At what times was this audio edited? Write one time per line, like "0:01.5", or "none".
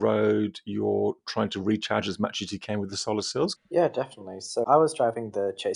0:03.6
0:04.6